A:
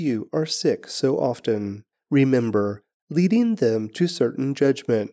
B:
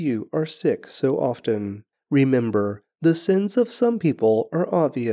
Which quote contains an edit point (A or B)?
A